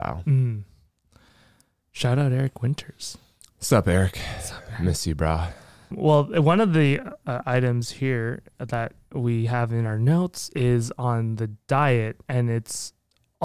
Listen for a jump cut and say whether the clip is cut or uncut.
uncut